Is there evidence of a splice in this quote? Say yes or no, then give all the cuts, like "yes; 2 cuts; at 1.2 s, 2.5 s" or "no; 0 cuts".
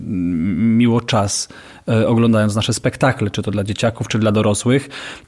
no; 0 cuts